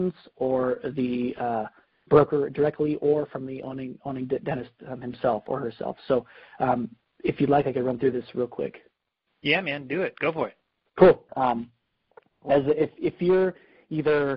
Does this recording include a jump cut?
yes; 1 cut; at 11.3 s

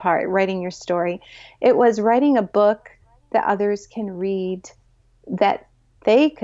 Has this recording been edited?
no; 0 cuts

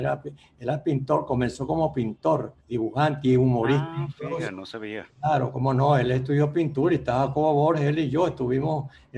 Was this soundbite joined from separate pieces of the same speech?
yes; 1 cut; at 2.6 s

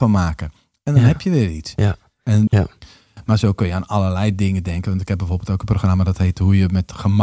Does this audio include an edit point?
yes; 1 cut; at 2.5 s

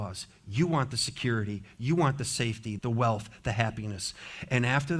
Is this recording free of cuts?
no; 1 cut; at 2.8 s

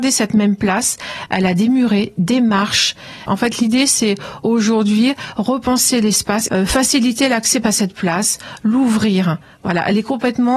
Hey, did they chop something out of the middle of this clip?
yes; 3 cuts; at 3.3 s, 6.5 s, 7.6 s

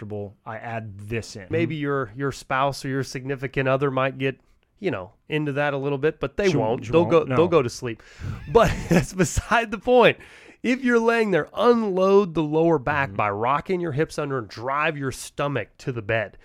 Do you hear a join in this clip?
yes; 1 cut; at 1.5 s

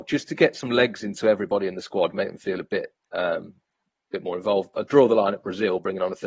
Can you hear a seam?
no; 0 cuts

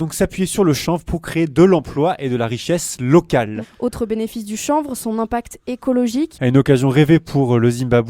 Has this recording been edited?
yes; 2 cuts; at 3.6 s, 6.3 s

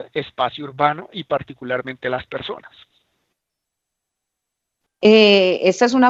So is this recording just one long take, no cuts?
no; 1 cut; at 4.9 s

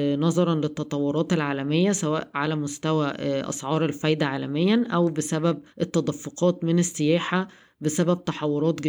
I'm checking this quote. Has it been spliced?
yes; 1 cut; at 5.7 s

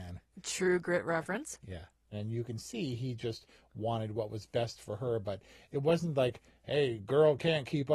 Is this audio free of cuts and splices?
yes; 0 cuts

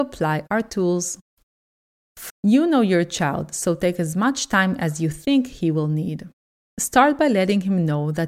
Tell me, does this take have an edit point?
yes; 1 cut; at 2.3 s

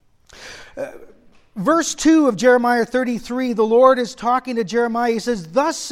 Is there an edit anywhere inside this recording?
no; 0 cuts

